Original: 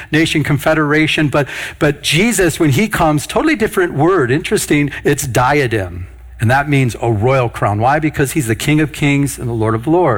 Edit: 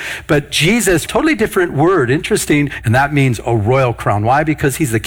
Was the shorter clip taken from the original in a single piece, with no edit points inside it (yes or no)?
no